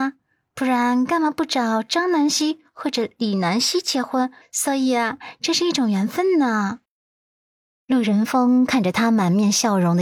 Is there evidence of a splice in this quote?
yes; 1 cut; at 4.4 s

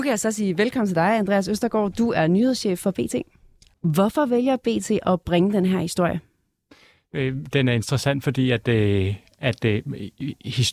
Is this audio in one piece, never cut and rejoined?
no; 1 cut; at 3.7 s

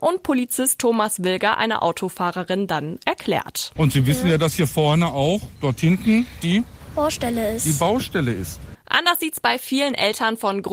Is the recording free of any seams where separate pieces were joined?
no; 2 cuts; at 3.8 s, 8.7 s

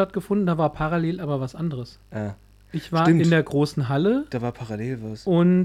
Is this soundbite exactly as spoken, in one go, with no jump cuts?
yes; 0 cuts

